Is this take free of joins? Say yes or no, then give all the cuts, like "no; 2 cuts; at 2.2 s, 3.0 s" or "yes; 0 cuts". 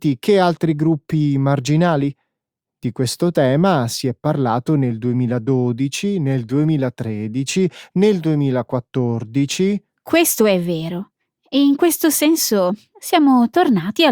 yes; 0 cuts